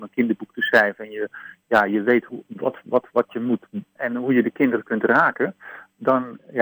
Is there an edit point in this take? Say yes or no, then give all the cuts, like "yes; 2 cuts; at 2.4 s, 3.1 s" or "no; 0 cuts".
yes; 1 cut; at 4.0 s